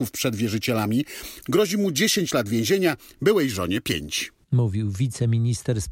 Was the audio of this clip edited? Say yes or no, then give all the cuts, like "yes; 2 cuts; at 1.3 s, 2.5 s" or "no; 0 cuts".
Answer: yes; 2 cuts; at 1.4 s, 4.4 s